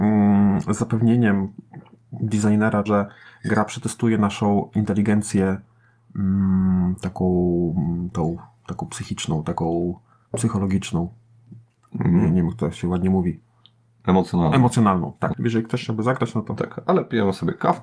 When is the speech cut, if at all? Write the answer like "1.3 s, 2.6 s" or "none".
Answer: 2.9 s, 15.3 s